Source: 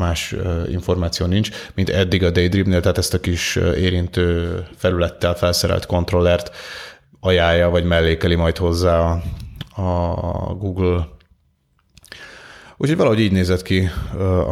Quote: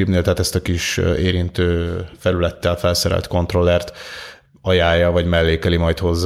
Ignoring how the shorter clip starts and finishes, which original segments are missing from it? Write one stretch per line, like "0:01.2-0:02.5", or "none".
none